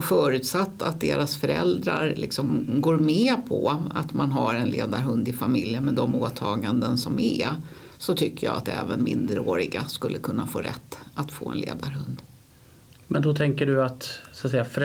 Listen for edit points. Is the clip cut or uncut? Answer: uncut